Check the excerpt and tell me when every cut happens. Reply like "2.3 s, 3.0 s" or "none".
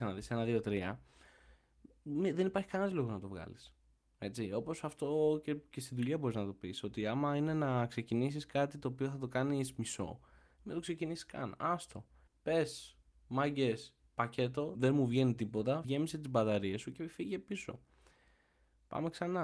12.3 s, 14.7 s, 15.8 s